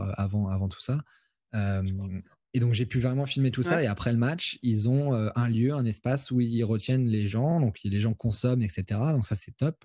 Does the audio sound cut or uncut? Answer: uncut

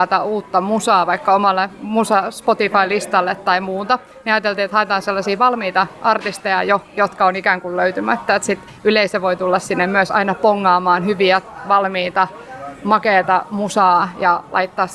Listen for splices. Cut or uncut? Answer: uncut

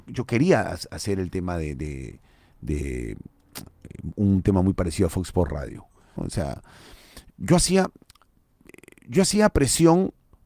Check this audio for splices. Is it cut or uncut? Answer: cut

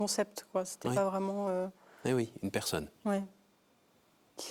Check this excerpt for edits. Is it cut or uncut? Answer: uncut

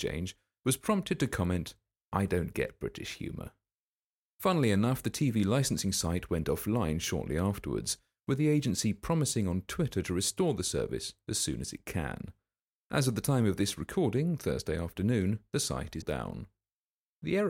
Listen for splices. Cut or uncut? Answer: cut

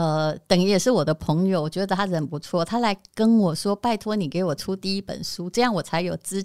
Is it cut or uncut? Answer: uncut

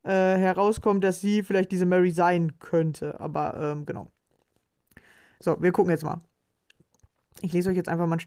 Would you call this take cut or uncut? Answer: uncut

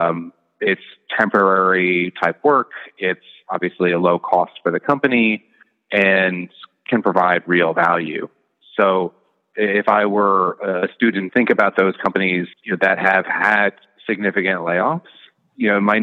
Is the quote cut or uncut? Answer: cut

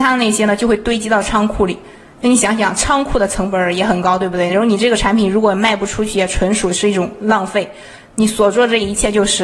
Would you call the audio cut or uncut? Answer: uncut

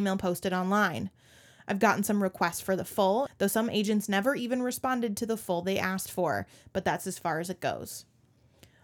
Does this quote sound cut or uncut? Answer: cut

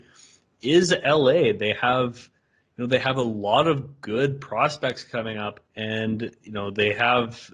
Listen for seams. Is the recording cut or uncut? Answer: cut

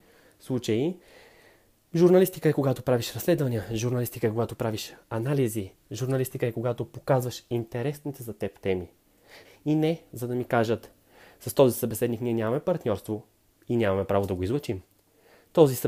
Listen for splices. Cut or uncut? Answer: cut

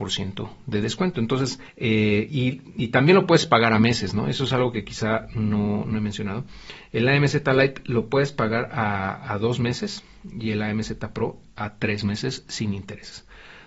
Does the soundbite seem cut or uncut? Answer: uncut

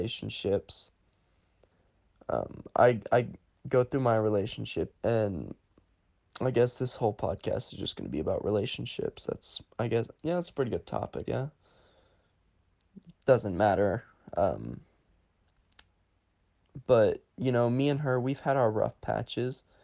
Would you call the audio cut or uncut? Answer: cut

